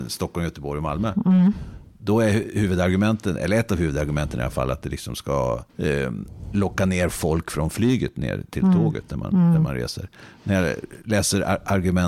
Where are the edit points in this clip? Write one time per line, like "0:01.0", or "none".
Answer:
0:05.7